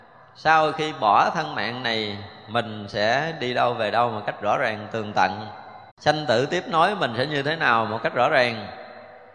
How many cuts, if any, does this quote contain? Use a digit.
1